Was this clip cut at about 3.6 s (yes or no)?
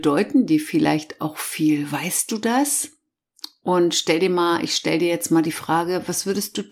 no